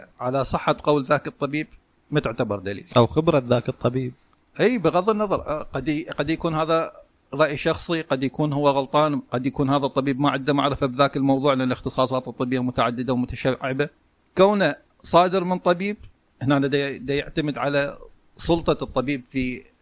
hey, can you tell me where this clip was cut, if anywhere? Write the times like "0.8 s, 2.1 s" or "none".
17.0 s